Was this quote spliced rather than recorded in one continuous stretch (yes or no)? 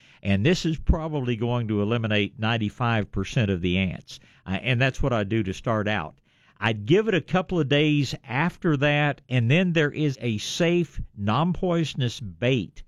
yes